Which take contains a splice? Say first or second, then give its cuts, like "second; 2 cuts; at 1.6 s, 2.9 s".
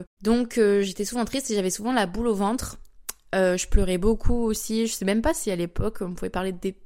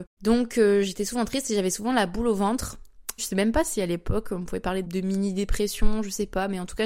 second; 2 cuts; at 3.2 s, 4.8 s